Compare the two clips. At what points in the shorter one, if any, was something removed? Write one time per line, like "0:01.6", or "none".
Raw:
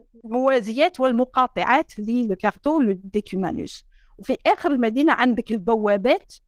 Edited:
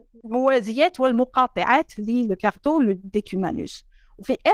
none